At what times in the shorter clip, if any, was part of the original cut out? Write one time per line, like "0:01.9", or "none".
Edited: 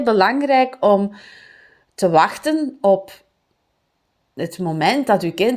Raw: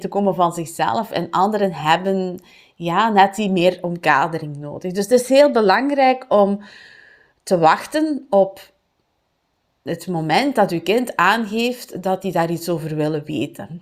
none